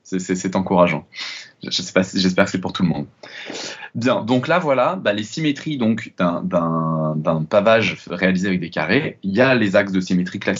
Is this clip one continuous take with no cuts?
yes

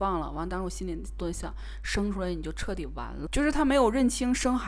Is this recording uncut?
no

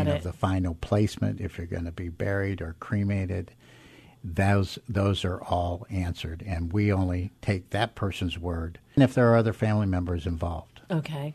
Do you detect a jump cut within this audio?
yes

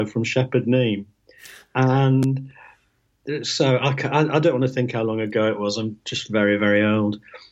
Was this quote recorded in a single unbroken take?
yes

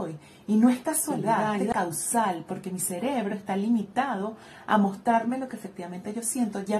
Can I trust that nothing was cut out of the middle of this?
no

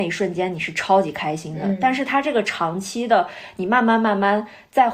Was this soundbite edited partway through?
no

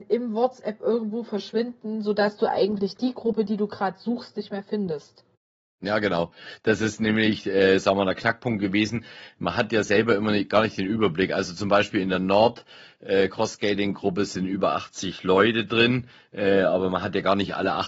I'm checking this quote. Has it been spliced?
no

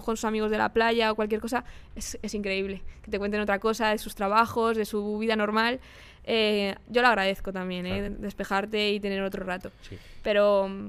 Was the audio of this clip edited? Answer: no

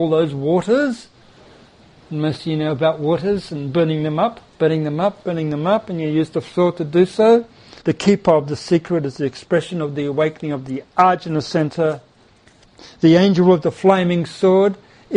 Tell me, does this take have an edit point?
yes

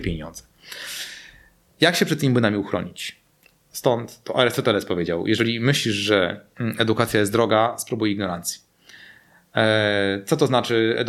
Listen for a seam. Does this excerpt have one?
yes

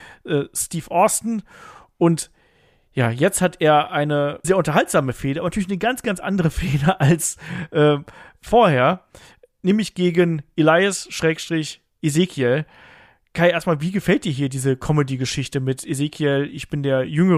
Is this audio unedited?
no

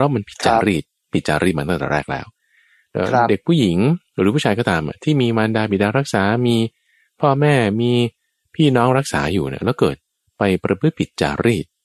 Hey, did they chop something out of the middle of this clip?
no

